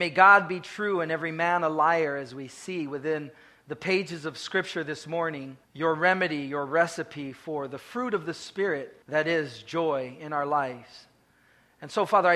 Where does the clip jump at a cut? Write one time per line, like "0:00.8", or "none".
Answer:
0:05.6
0:09.0